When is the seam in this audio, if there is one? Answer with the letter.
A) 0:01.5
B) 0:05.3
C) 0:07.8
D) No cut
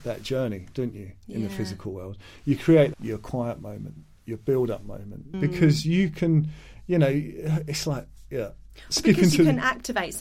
B